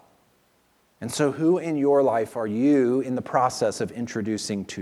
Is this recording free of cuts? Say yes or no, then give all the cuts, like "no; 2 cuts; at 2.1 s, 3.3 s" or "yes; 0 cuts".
yes; 0 cuts